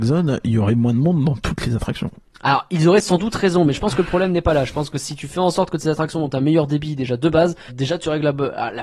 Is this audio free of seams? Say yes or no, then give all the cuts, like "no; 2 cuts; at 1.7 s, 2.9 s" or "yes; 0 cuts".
no; 1 cut; at 7.7 s